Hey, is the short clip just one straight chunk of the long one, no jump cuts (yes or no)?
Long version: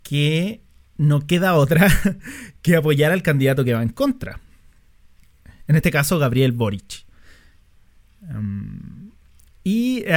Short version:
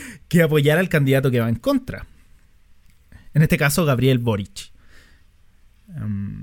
yes